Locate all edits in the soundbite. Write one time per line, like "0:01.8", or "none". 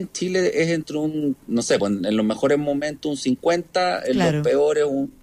none